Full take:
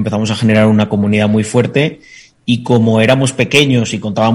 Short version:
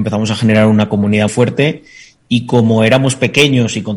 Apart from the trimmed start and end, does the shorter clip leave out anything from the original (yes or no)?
yes